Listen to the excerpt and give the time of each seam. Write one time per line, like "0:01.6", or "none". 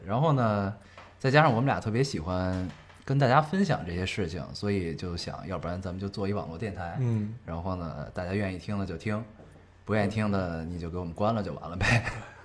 none